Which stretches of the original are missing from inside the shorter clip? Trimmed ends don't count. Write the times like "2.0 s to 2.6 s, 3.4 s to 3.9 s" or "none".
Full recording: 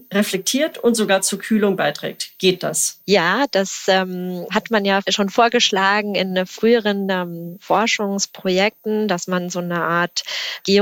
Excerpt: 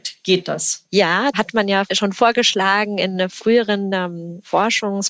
3.5 s to 4.5 s